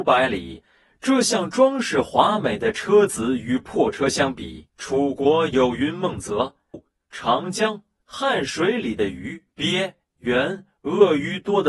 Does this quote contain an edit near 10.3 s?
no; 2 cuts; at 4.7 s, 6.7 s

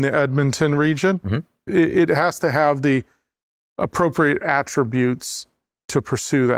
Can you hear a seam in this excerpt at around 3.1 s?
no; 1 cut; at 1.7 s

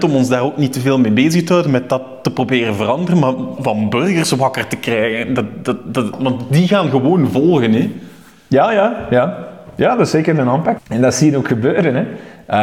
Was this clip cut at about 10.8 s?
yes; 2 cuts; at 3.6 s, 10.8 s

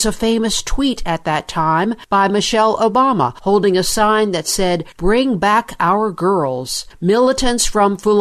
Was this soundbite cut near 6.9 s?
yes; 1 cut; at 6.9 s

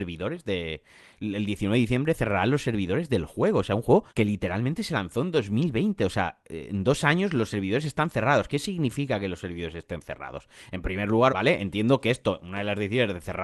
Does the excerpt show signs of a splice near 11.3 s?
yes; 2 cuts; at 4.1 s, 11.3 s

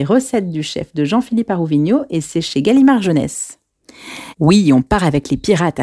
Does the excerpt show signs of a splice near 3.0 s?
no; 1 cut; at 4.3 s

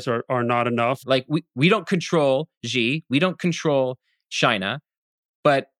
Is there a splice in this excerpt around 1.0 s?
yes; 1 cut; at 1.0 s

